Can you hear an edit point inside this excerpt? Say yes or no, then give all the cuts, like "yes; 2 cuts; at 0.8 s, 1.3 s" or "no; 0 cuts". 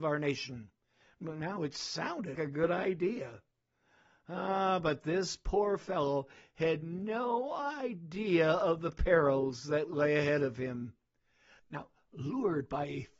yes; 2 cuts; at 2.4 s, 11.6 s